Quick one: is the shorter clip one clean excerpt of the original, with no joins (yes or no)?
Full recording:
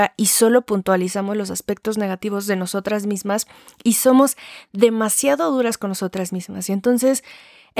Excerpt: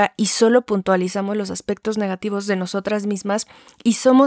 yes